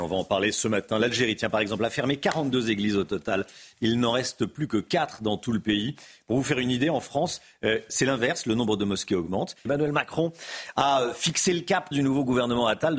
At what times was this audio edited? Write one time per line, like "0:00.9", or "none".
0:09.7
0:11.9